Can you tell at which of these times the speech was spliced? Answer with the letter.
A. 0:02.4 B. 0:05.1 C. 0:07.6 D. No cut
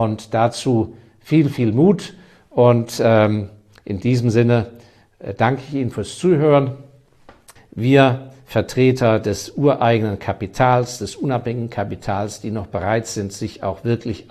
C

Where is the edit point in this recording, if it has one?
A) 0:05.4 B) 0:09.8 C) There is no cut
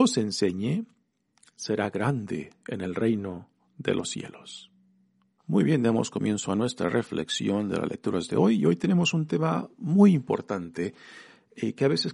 A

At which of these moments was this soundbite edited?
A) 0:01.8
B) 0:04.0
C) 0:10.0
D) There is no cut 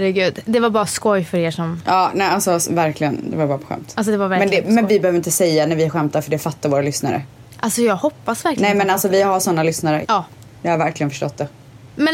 C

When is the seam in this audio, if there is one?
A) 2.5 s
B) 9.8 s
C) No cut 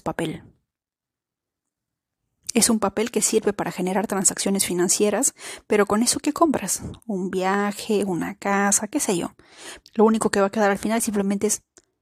B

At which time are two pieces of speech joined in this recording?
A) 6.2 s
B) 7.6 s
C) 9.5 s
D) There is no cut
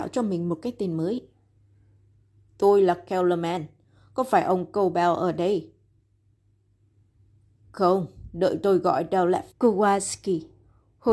C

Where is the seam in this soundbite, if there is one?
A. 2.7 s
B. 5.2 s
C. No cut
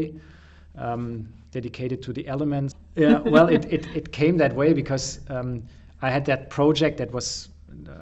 A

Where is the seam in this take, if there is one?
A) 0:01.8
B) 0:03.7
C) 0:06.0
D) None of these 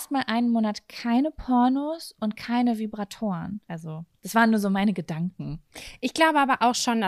B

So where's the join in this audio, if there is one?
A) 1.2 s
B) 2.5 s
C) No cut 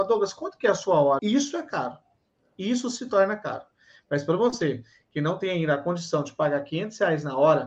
A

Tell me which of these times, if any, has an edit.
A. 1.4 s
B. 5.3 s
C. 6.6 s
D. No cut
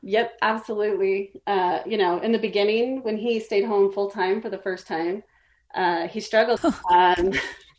C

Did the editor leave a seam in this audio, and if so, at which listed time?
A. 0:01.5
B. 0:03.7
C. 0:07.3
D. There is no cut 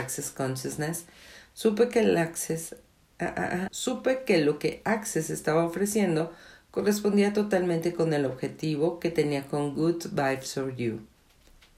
B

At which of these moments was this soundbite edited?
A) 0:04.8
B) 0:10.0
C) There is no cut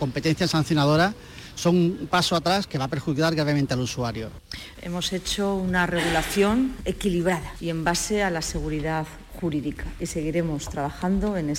A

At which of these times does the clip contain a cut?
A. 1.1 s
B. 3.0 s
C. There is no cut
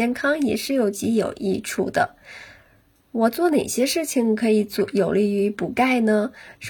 B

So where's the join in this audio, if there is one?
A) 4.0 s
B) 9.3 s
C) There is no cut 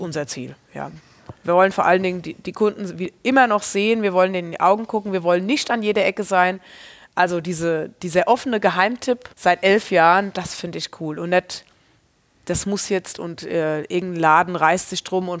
B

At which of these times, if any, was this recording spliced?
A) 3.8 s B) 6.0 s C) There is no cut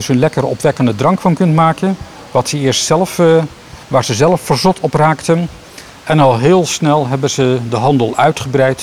A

